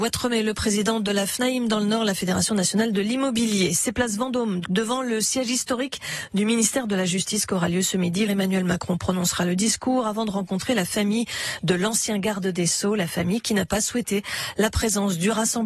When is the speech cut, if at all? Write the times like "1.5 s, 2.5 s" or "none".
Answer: 4.6 s, 8.3 s